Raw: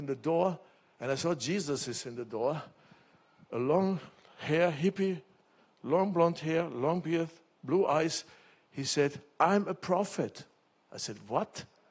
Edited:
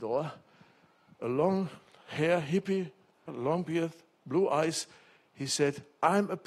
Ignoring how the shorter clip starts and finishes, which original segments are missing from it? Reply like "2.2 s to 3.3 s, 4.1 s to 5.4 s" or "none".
5.6 s to 6.6 s